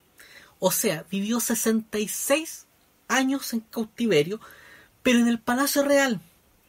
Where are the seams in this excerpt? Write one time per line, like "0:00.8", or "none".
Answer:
none